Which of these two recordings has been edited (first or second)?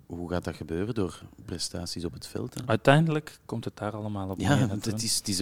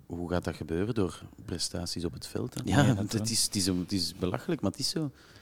second